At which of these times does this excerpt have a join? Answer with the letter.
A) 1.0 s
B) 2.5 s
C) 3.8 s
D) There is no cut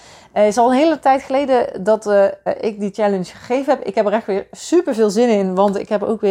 B